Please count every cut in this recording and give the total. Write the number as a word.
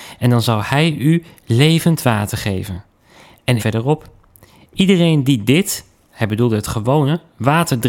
one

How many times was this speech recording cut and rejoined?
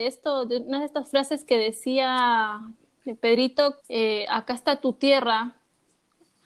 one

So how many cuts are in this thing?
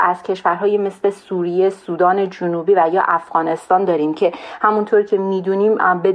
zero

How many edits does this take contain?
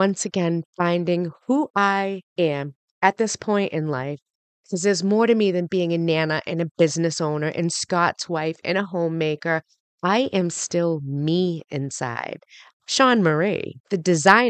one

